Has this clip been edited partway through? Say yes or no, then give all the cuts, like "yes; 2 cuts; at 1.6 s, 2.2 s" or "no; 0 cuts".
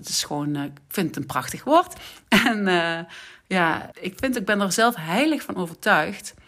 yes; 1 cut; at 3.9 s